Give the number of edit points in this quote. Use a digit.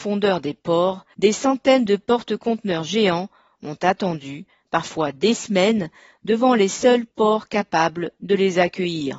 1